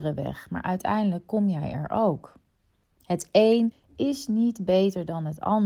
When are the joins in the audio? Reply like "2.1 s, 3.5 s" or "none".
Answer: none